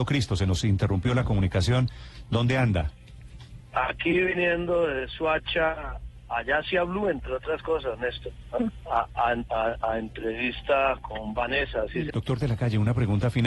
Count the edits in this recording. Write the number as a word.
two